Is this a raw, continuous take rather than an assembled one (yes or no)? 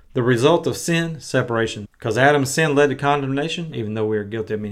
no